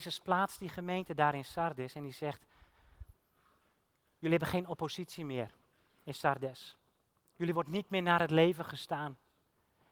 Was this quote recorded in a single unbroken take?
yes; 0 cuts

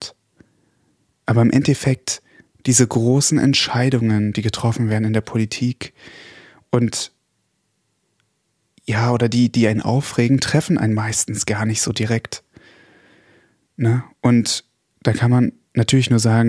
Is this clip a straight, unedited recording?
yes; 0 cuts

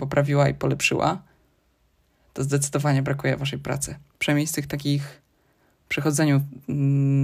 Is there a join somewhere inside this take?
yes; 1 cut; at 4.1 s

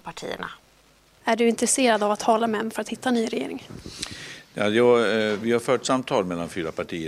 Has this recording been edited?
yes; 1 cut; at 1.2 s

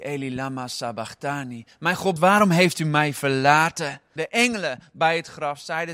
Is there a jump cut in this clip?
yes; 2 cuts; at 2.2 s, 4.2 s

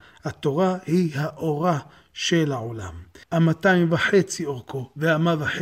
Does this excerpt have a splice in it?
yes; 1 cut; at 3.2 s

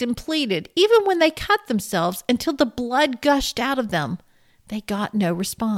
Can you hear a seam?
no; 0 cuts

